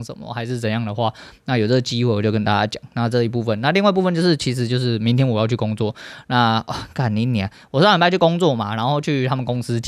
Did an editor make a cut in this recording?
no; 0 cuts

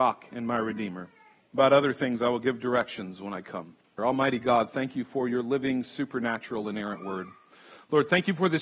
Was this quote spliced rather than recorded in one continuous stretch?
yes; 2 cuts; at 1.4 s, 4.0 s

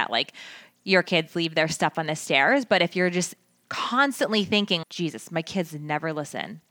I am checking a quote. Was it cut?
yes; 1 cut; at 4.8 s

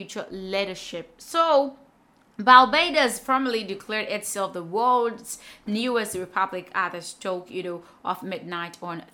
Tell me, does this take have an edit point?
no; 0 cuts

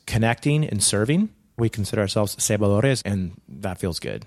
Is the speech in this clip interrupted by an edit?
yes; 2 cuts; at 1.6 s, 3.0 s

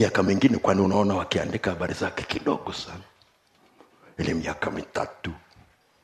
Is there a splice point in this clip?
no; 0 cuts

